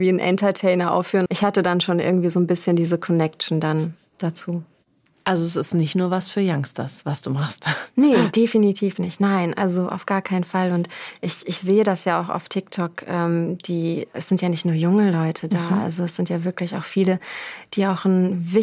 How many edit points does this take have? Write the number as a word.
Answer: one